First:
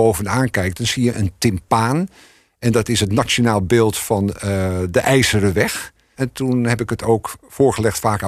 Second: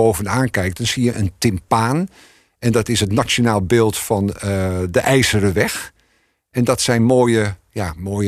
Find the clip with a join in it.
first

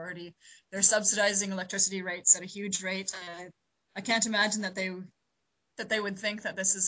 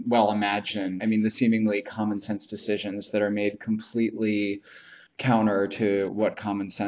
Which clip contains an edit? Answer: second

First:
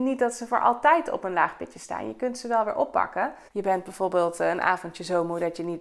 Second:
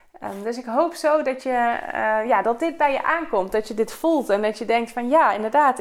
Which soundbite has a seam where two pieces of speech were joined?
first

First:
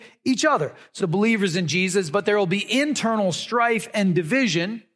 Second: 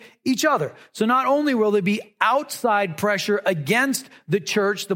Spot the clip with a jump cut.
first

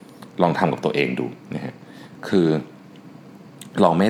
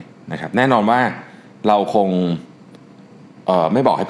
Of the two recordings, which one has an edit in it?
first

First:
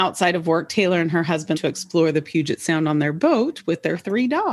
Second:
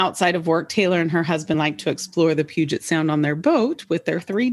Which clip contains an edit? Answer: first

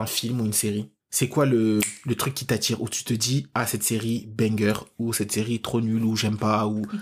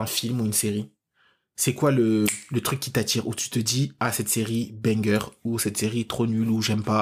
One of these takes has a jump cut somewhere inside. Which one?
first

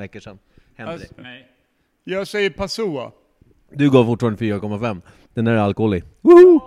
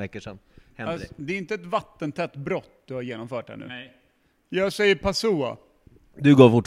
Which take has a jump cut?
first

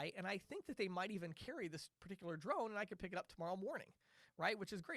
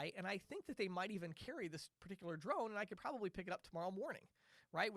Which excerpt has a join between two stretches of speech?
first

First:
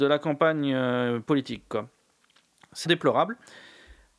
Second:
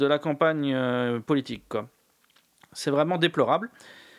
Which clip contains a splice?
first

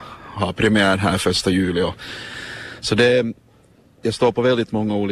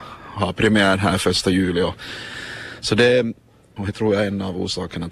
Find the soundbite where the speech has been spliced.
second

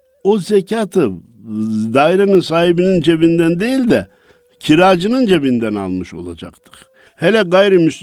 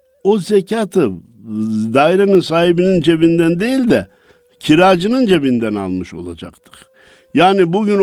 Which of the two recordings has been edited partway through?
first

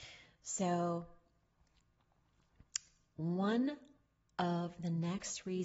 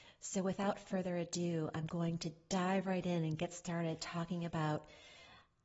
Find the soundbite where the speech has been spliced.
second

